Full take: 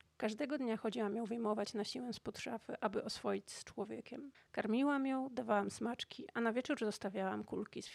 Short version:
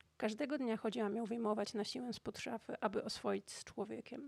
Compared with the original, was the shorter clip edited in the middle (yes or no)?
no